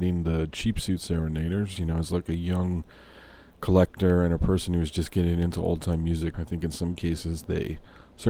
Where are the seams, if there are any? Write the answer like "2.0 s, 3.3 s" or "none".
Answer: 1.8 s, 6.3 s